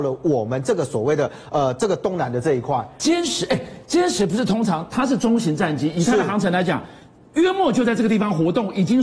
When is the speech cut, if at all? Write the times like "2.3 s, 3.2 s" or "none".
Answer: none